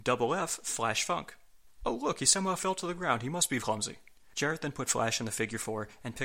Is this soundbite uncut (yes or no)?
no